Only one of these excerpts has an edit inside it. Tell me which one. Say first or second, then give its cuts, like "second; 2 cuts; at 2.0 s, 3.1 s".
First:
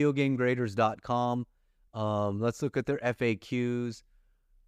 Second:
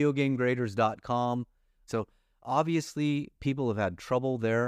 second; 1 cut; at 1.9 s